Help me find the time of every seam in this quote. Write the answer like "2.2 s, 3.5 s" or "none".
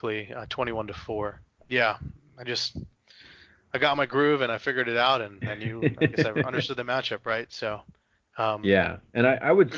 1.6 s